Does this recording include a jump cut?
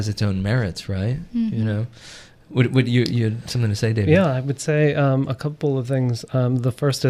no; 0 cuts

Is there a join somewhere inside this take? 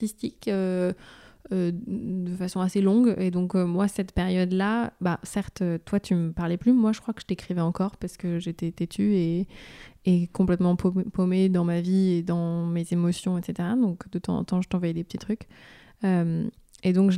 no; 0 cuts

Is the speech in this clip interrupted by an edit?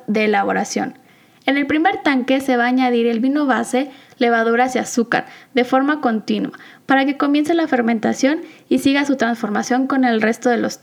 no; 0 cuts

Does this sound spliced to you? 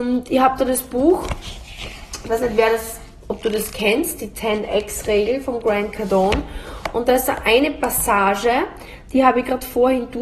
no; 0 cuts

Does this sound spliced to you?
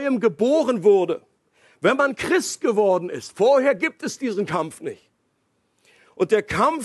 no; 0 cuts

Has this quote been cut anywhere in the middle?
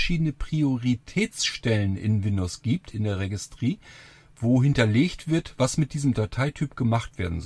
no; 0 cuts

